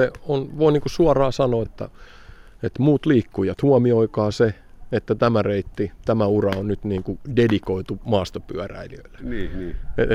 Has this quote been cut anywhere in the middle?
yes; 2 cuts; at 1.7 s, 9.2 s

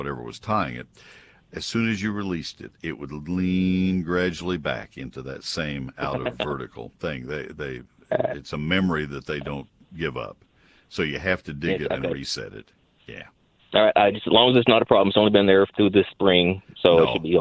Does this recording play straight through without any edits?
yes; 0 cuts

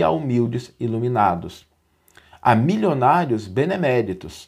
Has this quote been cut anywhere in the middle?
no; 0 cuts

